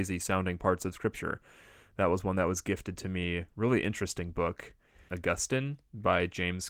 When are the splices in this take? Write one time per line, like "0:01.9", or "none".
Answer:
0:05.1